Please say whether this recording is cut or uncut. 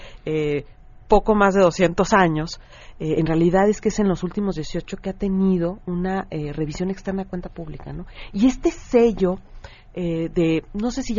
uncut